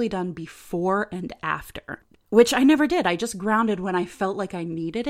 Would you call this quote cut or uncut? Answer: uncut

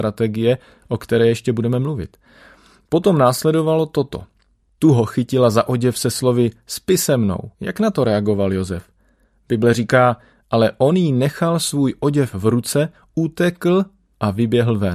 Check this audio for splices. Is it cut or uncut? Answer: cut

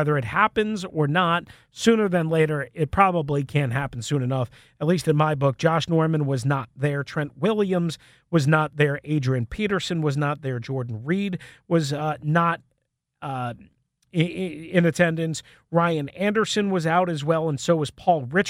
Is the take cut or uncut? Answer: uncut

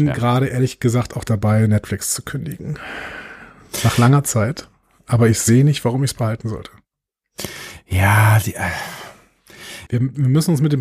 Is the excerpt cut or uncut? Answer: cut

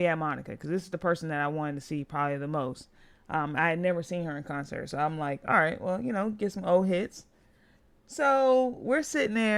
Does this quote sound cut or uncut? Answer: uncut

